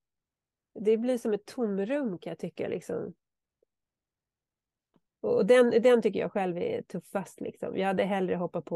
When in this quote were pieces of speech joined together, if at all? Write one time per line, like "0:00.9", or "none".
0:05.1